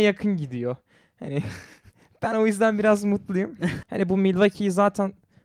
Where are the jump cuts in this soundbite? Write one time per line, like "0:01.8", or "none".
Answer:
0:03.8